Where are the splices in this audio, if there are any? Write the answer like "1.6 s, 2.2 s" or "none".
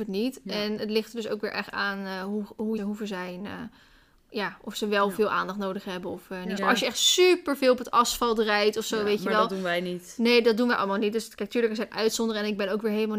2.8 s, 6.6 s